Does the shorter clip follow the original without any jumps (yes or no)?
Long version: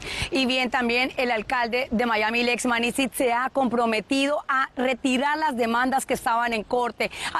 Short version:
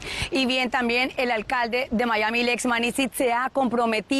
yes